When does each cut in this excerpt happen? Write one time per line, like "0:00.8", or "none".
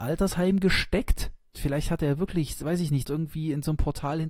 0:01.5
0:03.0